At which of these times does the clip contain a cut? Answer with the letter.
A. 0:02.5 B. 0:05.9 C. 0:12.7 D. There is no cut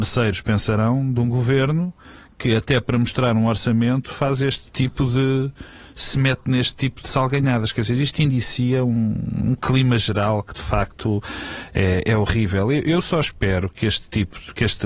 D